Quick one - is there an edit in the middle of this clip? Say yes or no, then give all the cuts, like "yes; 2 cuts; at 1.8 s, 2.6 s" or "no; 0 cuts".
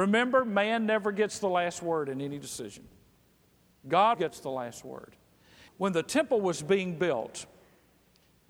yes; 2 cuts; at 4.1 s, 5.7 s